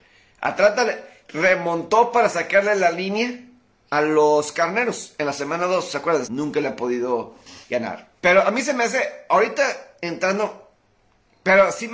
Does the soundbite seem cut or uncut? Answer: cut